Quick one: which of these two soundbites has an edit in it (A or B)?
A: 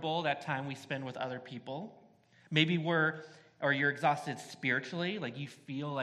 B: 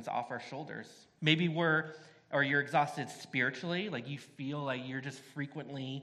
B